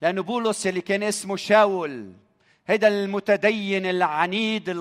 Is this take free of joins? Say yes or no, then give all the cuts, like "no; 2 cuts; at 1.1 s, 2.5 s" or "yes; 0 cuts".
yes; 0 cuts